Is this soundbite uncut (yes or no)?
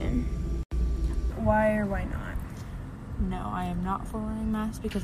no